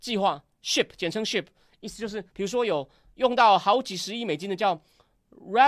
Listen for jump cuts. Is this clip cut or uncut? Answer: cut